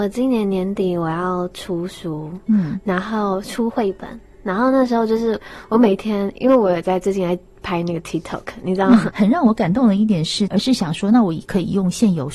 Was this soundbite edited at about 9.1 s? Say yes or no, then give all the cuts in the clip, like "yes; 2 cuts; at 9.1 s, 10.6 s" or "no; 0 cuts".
yes; 2 cuts; at 9.1 s, 10.5 s